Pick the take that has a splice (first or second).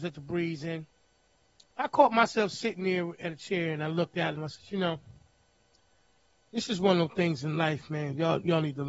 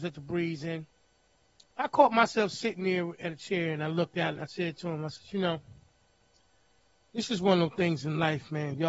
first